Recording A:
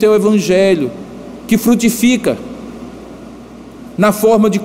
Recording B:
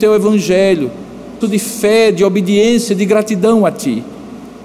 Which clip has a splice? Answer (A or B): B